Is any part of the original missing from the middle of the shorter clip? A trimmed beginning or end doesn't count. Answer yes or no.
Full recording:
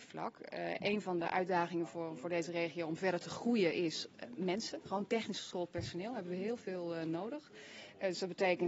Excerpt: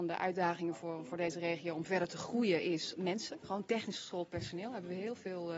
yes